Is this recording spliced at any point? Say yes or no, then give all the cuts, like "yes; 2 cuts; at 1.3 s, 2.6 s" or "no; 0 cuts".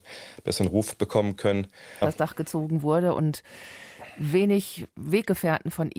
yes; 1 cut; at 2.0 s